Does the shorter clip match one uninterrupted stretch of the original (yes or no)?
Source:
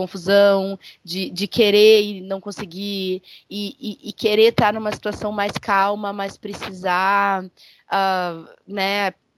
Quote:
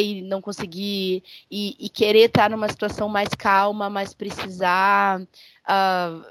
no